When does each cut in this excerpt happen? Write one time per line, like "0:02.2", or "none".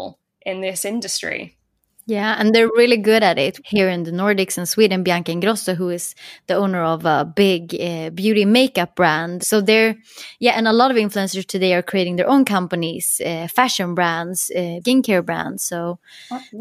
0:03.6
0:09.4
0:14.8